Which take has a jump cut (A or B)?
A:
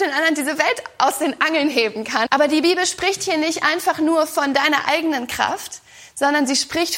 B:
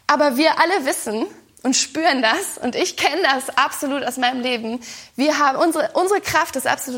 A